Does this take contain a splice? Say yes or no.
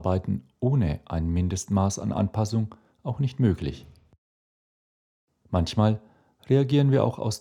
no